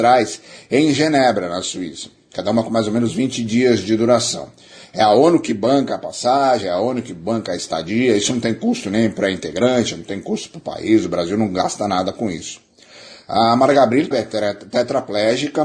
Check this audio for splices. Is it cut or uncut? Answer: cut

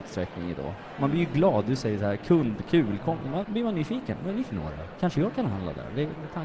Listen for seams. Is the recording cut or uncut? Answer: cut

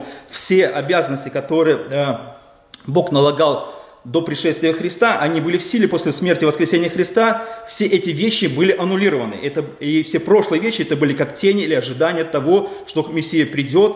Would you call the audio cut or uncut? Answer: uncut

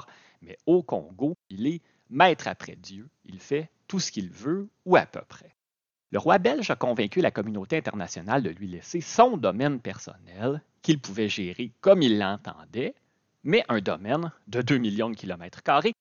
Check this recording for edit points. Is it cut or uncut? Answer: cut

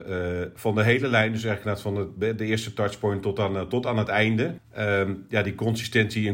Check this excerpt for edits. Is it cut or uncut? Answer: cut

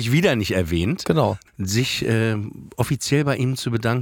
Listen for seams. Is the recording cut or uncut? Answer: cut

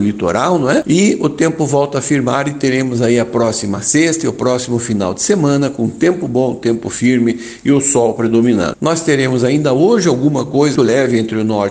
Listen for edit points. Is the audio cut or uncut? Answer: cut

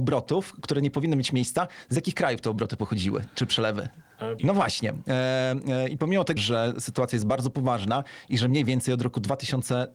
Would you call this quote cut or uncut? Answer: cut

